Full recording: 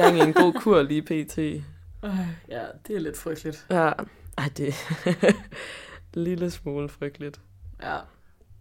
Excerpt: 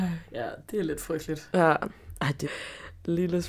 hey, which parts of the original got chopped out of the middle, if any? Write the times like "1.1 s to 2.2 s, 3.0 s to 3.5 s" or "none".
4.6 s to 5.5 s